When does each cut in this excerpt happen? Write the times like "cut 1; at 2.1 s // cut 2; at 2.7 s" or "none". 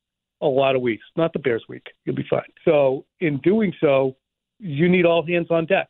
cut 1; at 2.6 s